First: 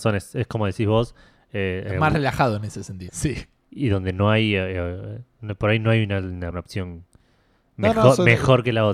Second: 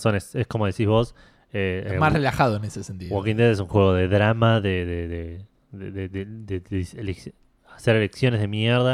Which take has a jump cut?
first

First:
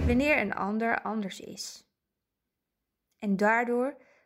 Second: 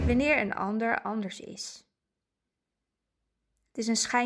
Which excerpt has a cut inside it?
first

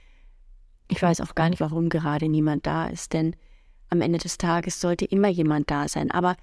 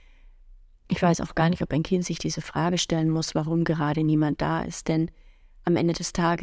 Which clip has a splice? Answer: first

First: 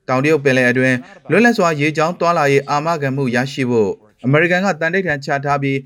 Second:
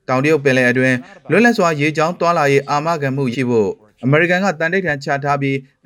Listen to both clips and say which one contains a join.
second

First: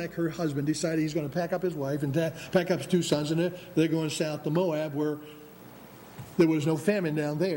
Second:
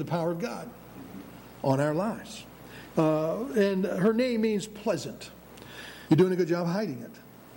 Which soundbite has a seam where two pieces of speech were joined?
second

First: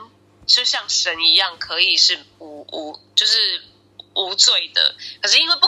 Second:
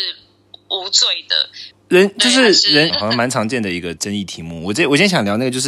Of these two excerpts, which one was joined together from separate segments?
second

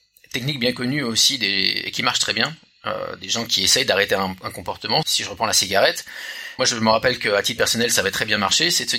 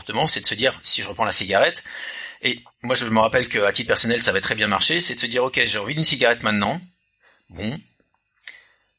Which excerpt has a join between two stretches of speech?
first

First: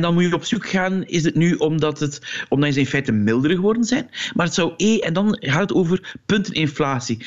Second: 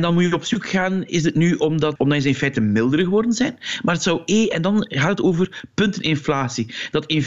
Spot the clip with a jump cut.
second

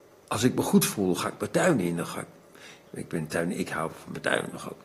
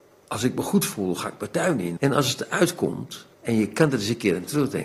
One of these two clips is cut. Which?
second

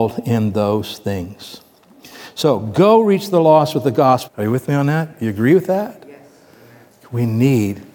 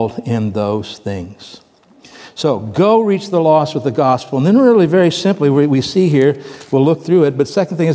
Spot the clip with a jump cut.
first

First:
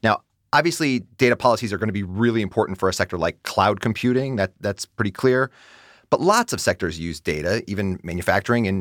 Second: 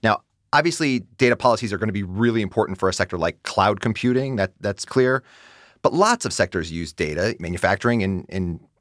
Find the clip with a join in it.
second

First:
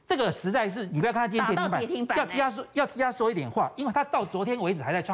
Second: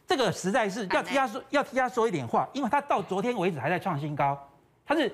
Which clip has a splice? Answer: second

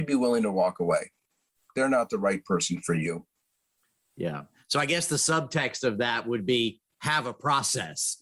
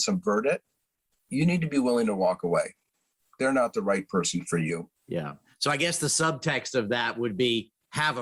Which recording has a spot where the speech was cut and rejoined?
second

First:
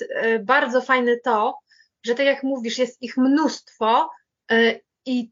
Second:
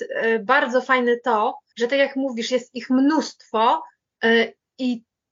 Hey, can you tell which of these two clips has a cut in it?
second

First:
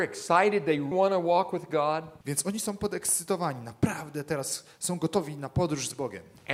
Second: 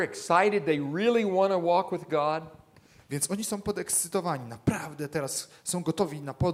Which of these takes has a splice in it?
first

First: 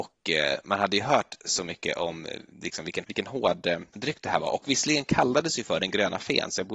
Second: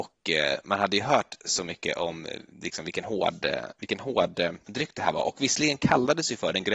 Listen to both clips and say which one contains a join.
first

